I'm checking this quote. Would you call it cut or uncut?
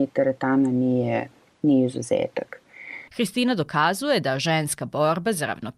cut